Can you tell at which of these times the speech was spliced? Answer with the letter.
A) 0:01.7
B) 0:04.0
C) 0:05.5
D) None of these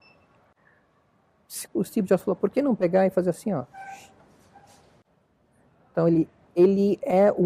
A